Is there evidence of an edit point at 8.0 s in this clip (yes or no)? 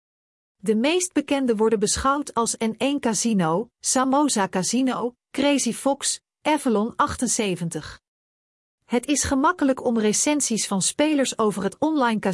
no